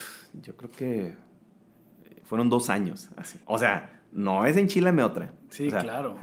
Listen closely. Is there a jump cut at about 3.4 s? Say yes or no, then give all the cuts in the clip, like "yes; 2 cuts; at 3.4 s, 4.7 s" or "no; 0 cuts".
yes; 1 cut; at 3.4 s